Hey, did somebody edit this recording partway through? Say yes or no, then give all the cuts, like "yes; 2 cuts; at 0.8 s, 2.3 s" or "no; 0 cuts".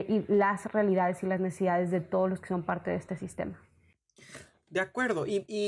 no; 0 cuts